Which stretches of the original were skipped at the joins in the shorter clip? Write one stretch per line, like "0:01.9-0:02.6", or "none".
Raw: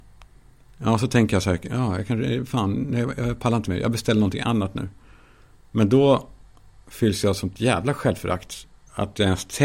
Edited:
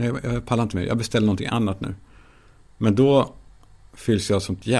none